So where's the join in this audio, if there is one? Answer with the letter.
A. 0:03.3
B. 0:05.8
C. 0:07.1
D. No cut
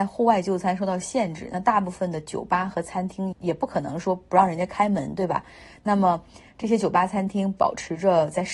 A